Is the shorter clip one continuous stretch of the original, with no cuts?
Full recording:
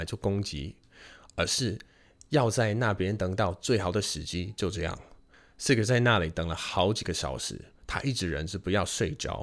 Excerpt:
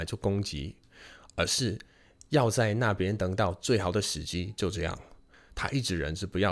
no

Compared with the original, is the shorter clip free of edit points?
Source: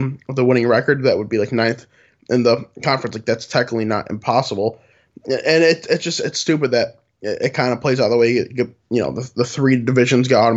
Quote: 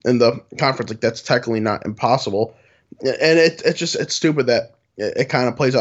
yes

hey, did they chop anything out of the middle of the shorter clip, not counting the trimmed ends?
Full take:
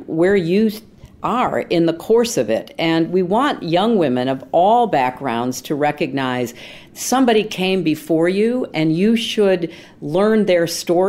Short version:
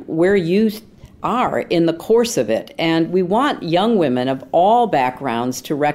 no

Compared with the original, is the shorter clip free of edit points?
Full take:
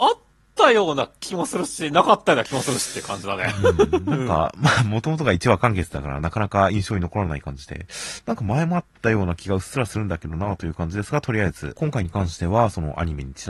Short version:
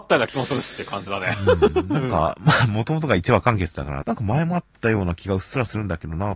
no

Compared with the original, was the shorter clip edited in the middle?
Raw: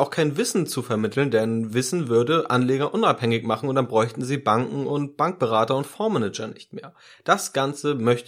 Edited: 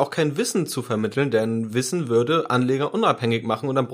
no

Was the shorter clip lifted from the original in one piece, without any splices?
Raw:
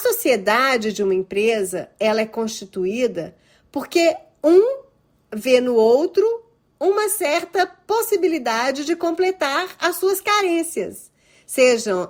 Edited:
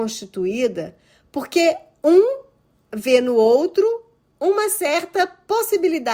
yes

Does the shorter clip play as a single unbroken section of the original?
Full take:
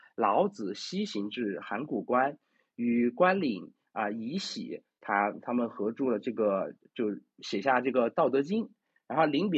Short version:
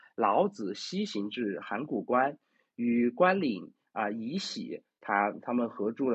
yes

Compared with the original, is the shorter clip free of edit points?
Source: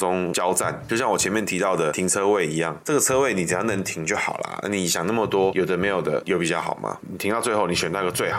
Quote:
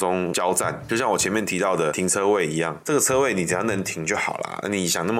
yes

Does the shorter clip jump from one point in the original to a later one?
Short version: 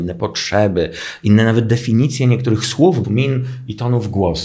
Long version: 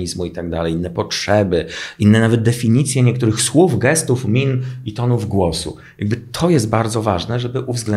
yes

